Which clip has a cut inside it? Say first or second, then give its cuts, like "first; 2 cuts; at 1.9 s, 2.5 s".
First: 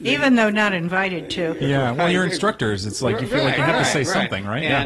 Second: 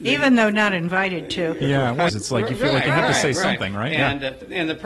second; 1 cut; at 2.1 s